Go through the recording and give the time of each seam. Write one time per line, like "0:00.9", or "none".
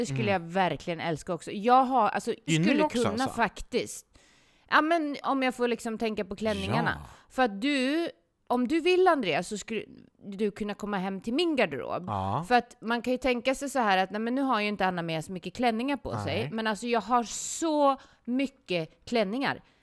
0:02.5
0:05.2